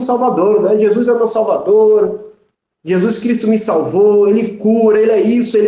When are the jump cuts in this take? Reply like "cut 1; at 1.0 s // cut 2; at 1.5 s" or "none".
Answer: none